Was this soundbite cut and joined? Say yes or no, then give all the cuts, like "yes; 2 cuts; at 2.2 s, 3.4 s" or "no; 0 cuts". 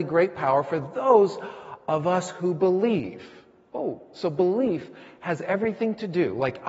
no; 0 cuts